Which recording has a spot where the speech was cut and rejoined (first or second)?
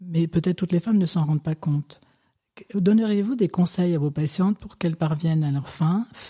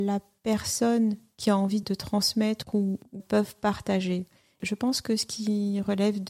second